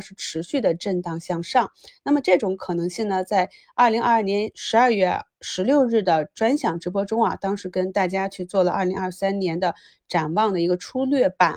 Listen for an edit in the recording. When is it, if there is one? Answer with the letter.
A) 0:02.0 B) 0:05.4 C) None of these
C